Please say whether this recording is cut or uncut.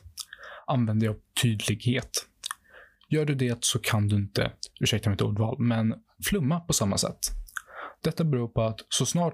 uncut